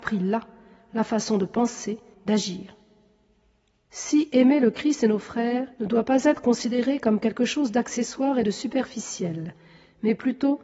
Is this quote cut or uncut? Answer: cut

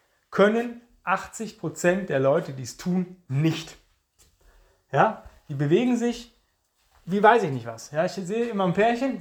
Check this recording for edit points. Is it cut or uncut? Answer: uncut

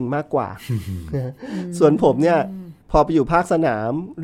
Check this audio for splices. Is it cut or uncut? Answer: cut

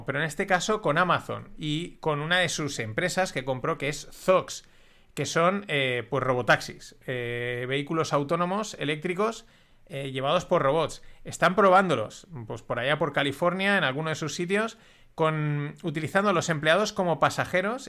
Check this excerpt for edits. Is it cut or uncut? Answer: uncut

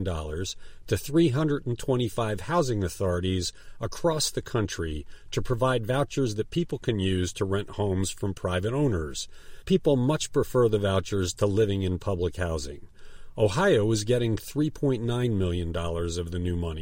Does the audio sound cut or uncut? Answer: uncut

